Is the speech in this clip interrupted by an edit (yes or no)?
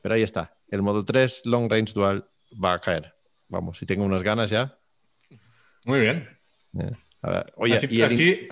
no